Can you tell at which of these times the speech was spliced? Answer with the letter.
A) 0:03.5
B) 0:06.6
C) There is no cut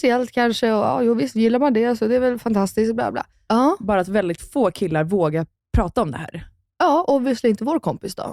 A